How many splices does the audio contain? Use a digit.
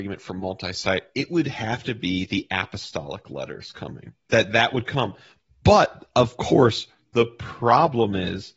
1